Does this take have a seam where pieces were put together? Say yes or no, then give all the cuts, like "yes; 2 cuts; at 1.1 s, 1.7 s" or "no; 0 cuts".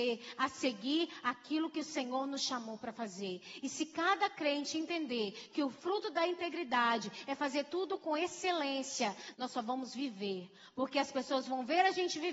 yes; 1 cut; at 9.3 s